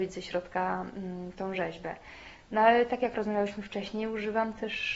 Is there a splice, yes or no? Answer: no